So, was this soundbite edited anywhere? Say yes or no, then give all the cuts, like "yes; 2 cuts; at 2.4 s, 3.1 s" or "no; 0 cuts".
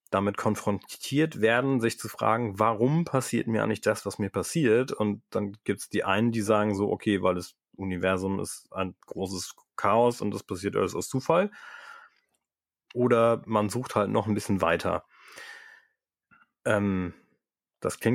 no; 0 cuts